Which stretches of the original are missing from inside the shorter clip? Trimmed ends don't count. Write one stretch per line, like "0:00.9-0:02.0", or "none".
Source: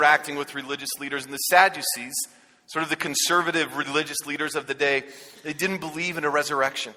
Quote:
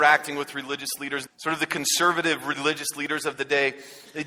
0:01.3-0:02.6